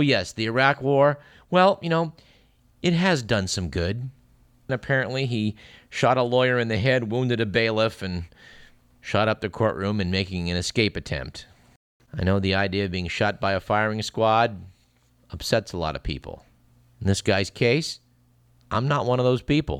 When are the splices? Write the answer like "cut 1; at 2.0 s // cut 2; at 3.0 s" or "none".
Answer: cut 1; at 4.7 s